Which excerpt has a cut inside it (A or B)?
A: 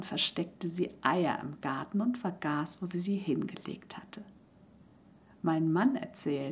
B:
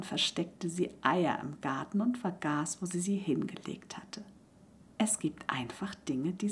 B